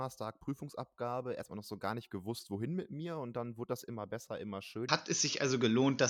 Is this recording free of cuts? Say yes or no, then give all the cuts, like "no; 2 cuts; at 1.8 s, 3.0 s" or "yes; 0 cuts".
no; 1 cut; at 4.9 s